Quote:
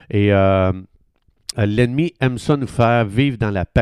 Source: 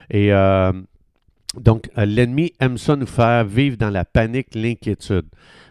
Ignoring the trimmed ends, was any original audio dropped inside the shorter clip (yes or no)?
yes